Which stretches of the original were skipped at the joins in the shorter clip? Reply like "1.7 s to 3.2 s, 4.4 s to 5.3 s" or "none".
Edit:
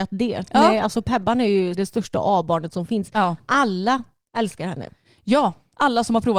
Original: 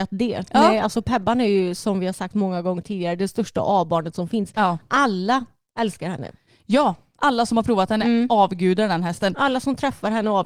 1.7 s to 3.2 s